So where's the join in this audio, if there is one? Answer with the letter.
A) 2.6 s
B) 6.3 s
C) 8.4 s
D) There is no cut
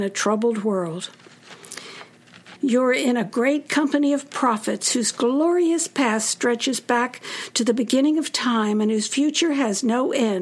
A